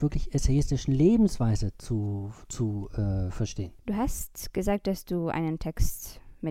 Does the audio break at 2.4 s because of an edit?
no; 1 cut; at 3.8 s

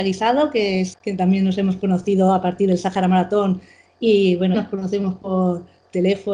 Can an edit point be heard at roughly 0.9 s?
yes; 2 cuts; at 0.9 s, 4.5 s

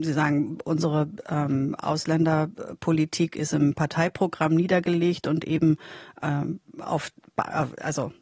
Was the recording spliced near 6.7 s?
no; 0 cuts

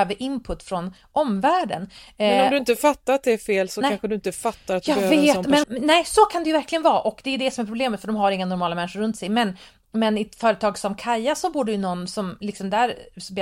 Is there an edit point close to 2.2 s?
no; 1 cut; at 5.6 s

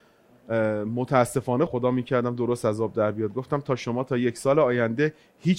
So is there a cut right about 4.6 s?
no; 1 cut; at 1.7 s

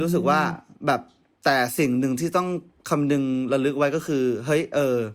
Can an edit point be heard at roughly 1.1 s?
no; 0 cuts

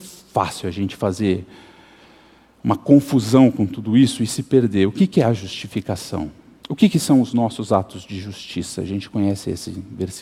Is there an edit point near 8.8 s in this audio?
no; 1 cut; at 6.6 s

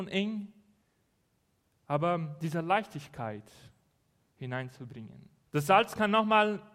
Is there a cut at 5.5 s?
yes; 1 cut; at 5.5 s

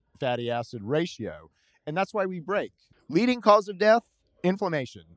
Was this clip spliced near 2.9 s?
yes; 1 cut; at 2.9 s

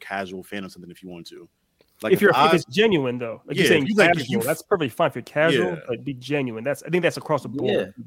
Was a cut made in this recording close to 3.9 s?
no; 0 cuts

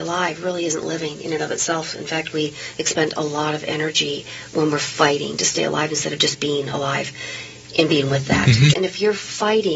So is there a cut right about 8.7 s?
yes; 1 cut; at 8.7 s

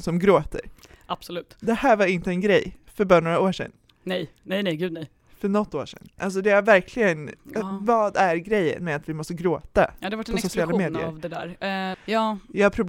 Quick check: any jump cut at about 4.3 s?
no; 1 cut; at 11.9 s

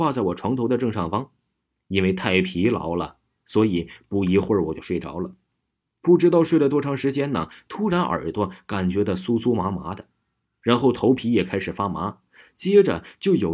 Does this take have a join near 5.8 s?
no; 0 cuts

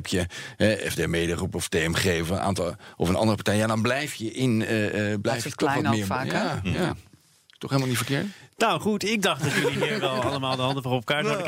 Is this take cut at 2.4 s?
no; 0 cuts

